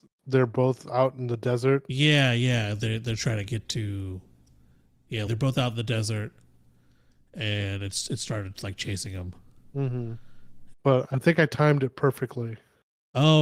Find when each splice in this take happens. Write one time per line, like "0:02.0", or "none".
0:05.3
0:10.7